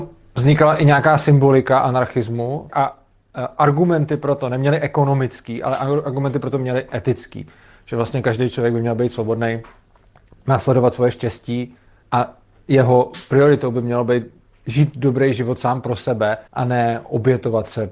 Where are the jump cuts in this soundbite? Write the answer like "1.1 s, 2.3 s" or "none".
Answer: 2.7 s, 12.0 s, 16.5 s

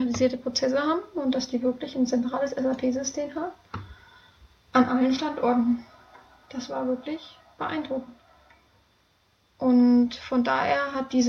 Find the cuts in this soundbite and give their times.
none

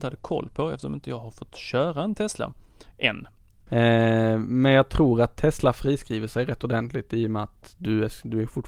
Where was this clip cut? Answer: 3.7 s

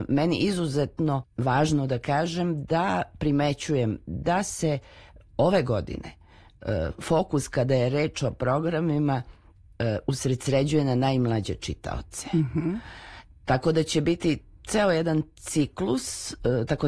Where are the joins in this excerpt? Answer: 1.2 s

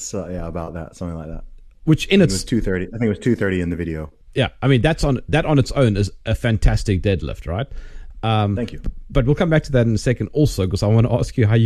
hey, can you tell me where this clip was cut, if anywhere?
4.2 s

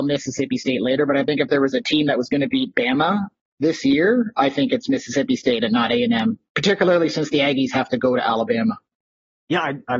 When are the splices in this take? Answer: none

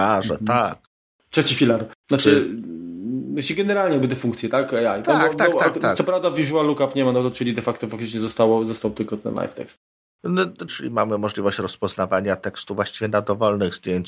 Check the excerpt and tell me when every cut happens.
1.9 s, 10.7 s

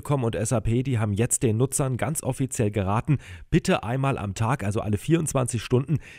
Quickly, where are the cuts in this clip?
none

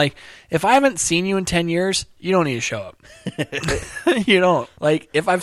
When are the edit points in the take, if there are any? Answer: none

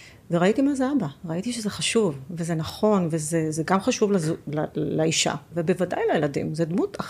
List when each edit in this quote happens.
5.5 s

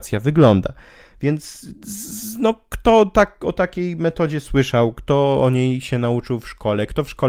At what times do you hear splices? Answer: none

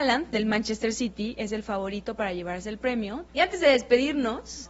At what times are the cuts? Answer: 3.3 s

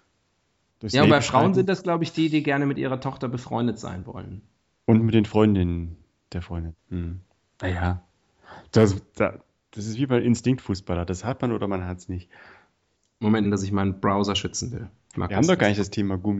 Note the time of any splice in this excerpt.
6.8 s, 13.4 s, 15.1 s

